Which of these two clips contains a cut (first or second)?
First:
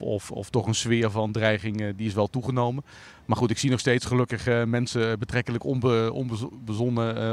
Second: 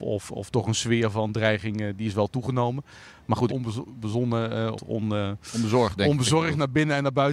second